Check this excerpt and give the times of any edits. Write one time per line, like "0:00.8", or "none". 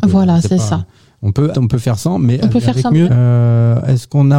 0:01.5
0:03.1

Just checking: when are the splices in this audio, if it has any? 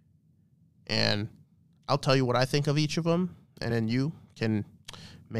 none

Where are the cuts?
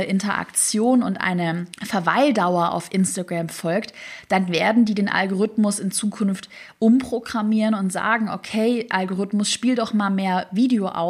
0:01.7

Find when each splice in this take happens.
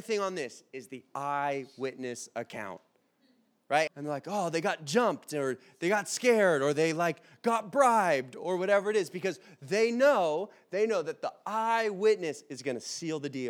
0:03.9

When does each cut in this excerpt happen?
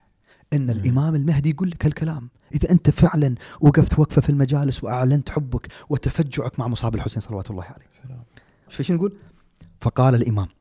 0:08.7

